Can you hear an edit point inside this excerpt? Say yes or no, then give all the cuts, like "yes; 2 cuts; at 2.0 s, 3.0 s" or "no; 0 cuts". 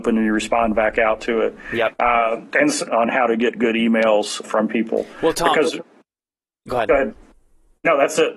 yes; 2 cuts; at 2.9 s, 4.4 s